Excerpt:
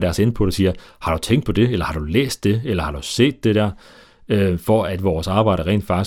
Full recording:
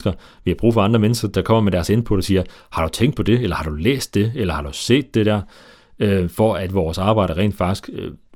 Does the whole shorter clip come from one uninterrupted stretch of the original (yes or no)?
yes